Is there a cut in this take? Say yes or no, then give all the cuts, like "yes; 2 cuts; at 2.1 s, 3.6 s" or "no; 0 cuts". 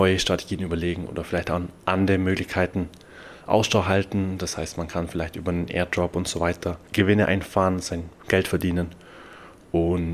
no; 0 cuts